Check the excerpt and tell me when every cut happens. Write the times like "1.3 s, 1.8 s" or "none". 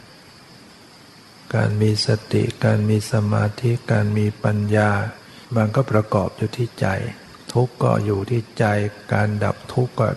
5.4 s, 7.4 s